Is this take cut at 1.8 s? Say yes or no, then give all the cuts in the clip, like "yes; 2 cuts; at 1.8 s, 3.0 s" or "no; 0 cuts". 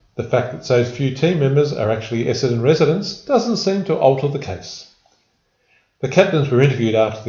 no; 0 cuts